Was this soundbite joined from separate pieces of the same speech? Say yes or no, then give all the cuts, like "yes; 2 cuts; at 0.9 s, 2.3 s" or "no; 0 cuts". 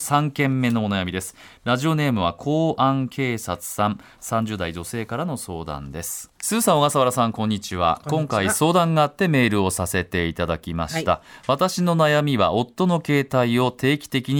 yes; 1 cut; at 6.4 s